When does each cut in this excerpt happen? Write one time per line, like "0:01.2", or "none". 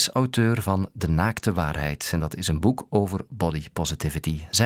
none

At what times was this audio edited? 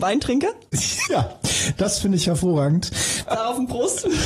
0:01.1
0:03.3

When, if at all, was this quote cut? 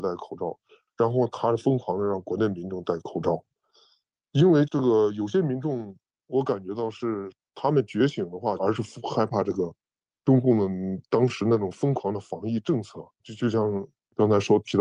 0:08.6
0:13.2

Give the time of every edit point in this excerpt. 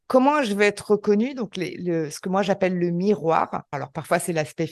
0:03.7

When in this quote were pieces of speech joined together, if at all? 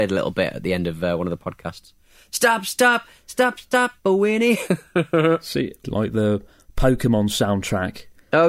0:05.8

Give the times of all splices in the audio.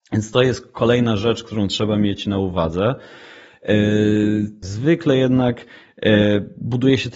0:04.6

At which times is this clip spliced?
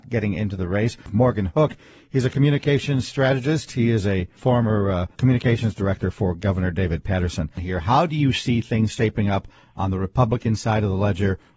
0:05.1

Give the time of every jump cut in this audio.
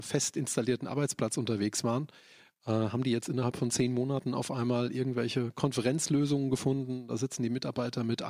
none

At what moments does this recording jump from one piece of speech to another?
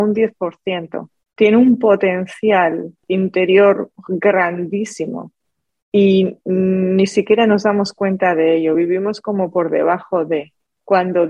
none

